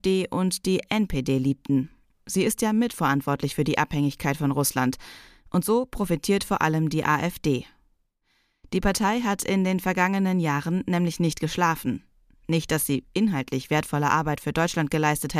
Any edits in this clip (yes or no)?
yes